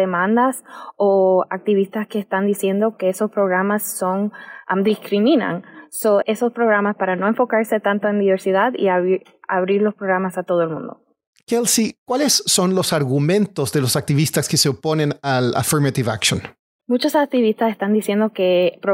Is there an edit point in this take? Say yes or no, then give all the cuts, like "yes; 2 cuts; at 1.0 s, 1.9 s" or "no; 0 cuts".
yes; 1 cut; at 6.2 s